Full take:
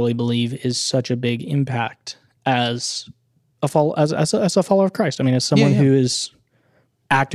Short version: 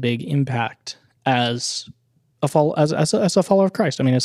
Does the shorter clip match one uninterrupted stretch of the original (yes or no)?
yes